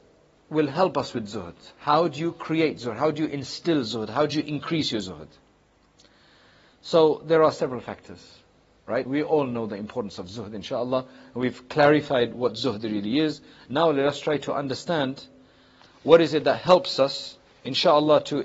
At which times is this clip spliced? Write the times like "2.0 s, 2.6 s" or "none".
9.1 s